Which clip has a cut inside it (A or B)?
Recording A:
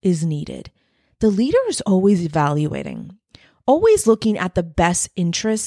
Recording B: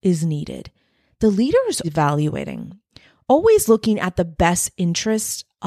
B